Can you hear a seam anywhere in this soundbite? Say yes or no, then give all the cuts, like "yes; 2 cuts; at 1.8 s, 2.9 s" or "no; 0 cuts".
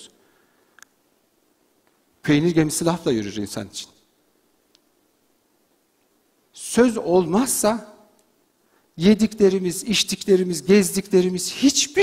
no; 0 cuts